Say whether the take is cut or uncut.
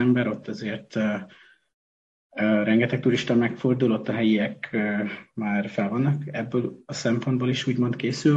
uncut